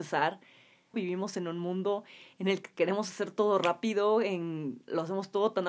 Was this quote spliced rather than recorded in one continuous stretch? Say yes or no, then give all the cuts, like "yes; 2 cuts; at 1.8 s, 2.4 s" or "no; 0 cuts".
yes; 1 cut; at 0.9 s